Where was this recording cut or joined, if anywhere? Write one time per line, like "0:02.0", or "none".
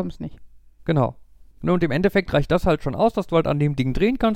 0:01.5